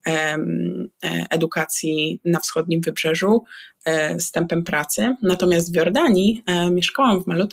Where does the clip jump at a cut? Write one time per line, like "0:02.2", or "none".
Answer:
0:04.2